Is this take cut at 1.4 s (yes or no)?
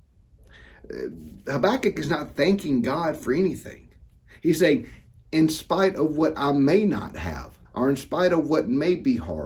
no